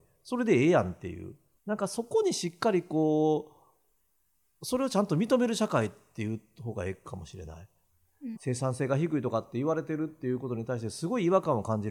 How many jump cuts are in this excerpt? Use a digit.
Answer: 2